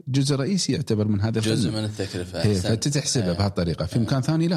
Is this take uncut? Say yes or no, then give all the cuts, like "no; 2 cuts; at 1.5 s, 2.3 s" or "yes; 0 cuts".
yes; 0 cuts